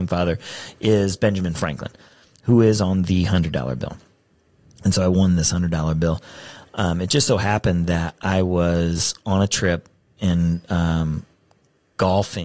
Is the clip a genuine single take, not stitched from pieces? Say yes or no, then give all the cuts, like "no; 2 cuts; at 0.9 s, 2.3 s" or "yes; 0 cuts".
yes; 0 cuts